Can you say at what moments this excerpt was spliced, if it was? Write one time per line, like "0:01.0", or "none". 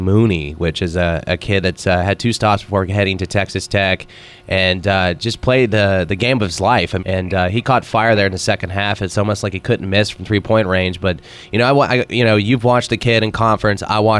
0:07.0